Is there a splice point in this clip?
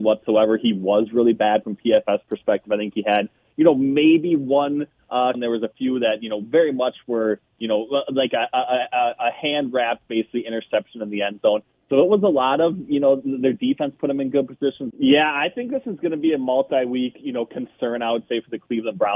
yes; 2 cuts; at 5.3 s, 14.9 s

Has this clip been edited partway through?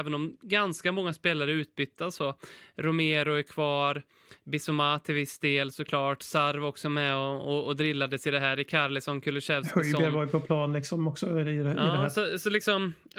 no; 0 cuts

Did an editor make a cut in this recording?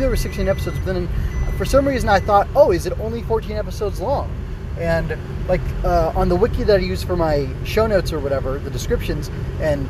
no; 0 cuts

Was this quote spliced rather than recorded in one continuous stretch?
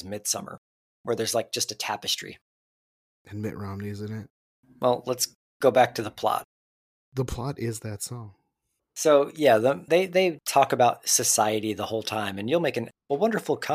yes; 1 cut; at 9.9 s

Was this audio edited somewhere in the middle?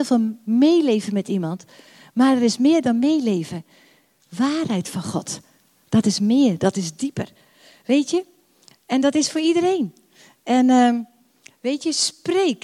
no; 0 cuts

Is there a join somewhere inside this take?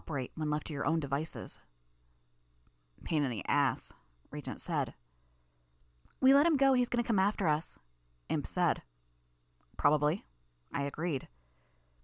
no; 0 cuts

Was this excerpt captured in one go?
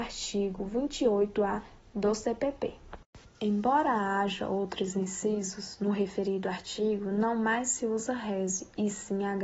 no; 1 cut; at 3.3 s

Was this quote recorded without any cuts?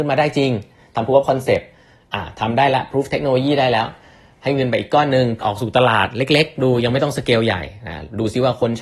no; 1 cut; at 5.4 s

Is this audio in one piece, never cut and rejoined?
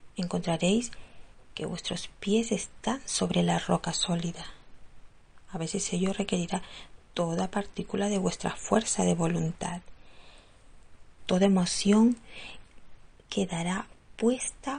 no; 1 cut; at 11.2 s

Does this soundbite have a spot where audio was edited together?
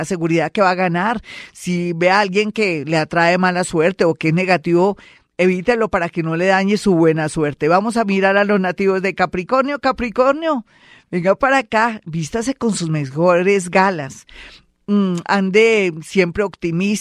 no; 0 cuts

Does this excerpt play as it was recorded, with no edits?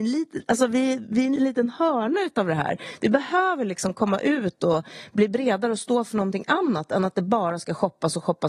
no; 1 cut; at 1.4 s

